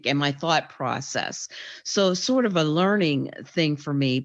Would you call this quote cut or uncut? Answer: uncut